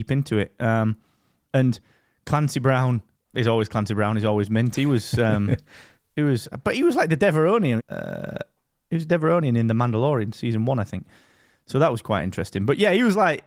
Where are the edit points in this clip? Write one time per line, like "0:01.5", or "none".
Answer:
0:07.8

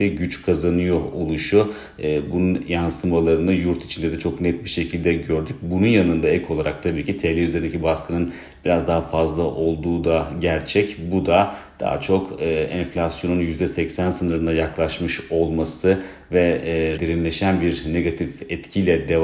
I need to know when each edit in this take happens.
0:17.0

